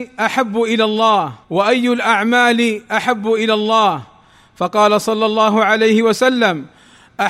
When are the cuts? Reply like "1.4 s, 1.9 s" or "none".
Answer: 1.4 s